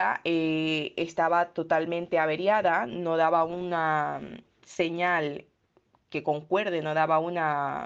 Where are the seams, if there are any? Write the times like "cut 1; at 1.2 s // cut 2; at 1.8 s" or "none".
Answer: none